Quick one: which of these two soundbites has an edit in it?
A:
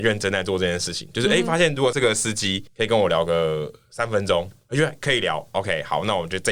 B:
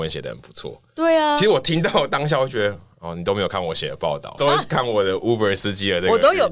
B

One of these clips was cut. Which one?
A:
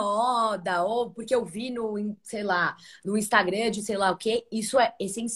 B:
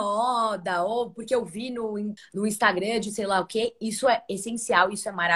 B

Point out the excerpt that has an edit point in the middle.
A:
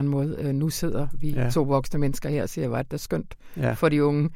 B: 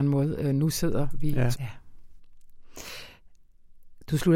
B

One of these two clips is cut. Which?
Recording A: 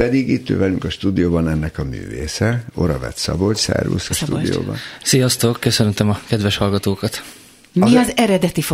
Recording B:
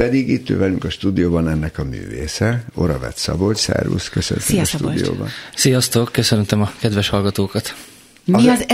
A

